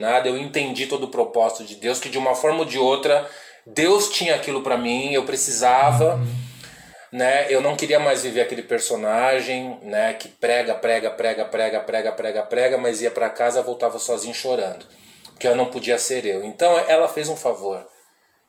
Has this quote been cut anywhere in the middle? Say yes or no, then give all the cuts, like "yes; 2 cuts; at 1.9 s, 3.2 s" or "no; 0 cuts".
no; 0 cuts